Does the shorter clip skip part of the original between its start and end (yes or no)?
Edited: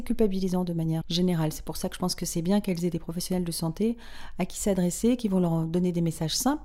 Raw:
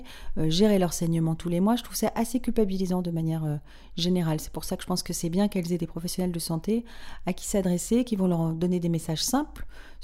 yes